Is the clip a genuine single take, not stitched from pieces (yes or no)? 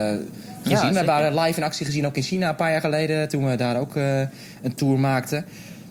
yes